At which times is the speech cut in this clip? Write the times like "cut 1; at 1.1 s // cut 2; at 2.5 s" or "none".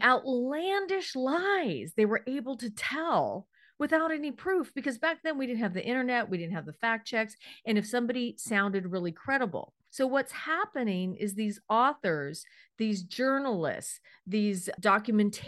none